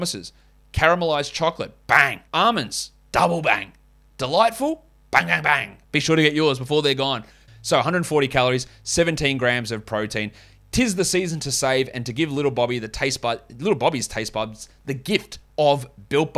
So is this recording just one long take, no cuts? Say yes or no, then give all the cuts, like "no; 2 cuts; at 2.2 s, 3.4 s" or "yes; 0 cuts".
no; 3 cuts; at 2.3 s, 5.8 s, 7.5 s